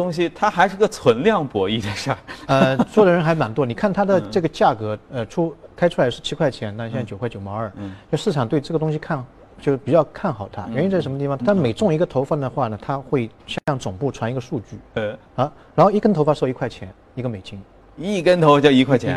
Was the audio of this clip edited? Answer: yes; 1 cut; at 11.4 s

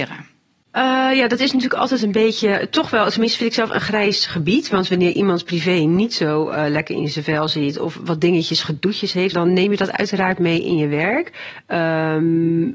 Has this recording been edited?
yes; 1 cut; at 9.3 s

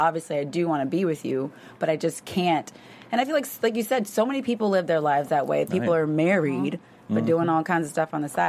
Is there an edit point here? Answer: no; 0 cuts

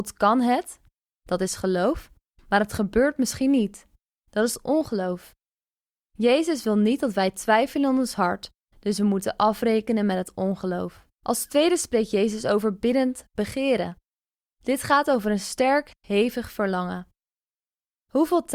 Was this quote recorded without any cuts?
no; 1 cut; at 11.1 s

